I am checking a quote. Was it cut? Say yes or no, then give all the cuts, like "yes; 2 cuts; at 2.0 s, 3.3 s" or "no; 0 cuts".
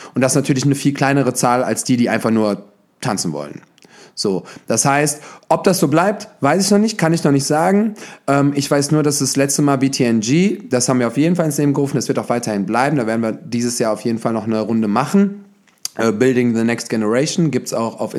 no; 0 cuts